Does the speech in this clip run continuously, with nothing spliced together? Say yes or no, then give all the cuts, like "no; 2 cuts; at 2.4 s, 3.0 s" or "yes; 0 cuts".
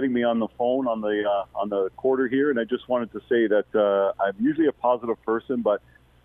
no; 1 cut; at 4.1 s